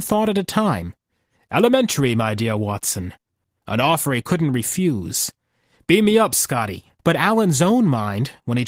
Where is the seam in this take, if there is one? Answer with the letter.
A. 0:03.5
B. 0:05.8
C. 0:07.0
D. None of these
C